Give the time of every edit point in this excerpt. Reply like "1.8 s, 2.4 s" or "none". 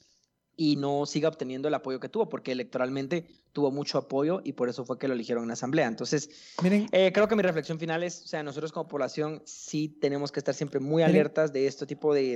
none